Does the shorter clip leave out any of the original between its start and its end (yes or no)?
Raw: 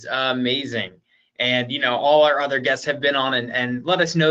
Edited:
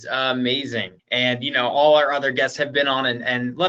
yes